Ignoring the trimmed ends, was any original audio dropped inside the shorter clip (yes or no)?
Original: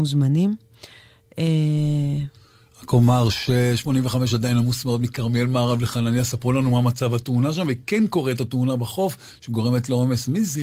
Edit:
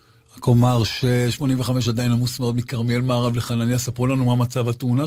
no